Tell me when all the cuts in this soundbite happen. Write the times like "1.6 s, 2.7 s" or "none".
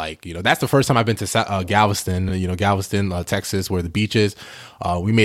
none

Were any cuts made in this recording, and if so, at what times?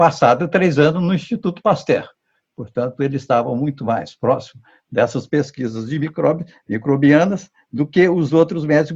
none

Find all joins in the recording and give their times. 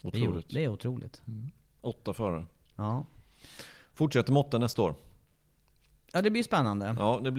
none

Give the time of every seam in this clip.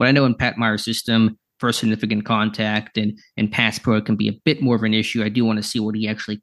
1.5 s

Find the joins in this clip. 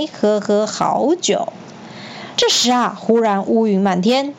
2.3 s

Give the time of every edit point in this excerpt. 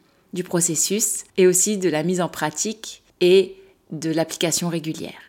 1.3 s, 3.1 s

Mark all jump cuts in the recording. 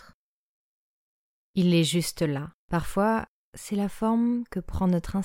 1.4 s, 2.6 s

